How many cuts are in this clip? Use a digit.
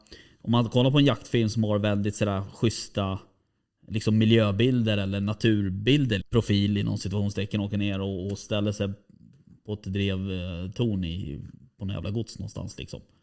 1